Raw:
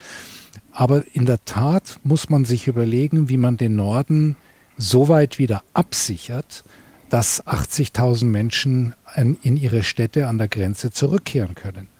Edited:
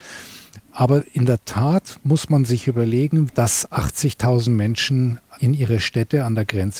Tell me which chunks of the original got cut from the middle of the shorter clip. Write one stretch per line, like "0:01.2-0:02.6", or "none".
0:03.3-0:07.0
0:09.1-0:09.4

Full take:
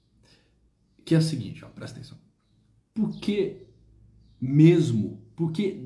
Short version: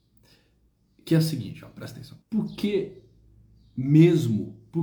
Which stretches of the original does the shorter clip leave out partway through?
0:02.2-0:02.9

